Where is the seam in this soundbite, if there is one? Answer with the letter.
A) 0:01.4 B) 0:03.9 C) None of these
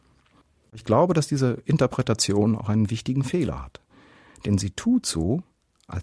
C